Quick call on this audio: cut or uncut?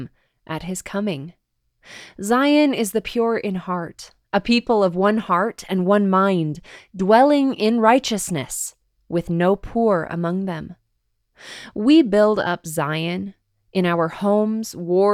uncut